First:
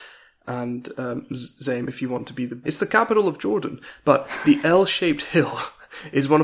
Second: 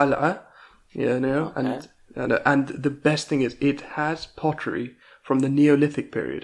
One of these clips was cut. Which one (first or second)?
first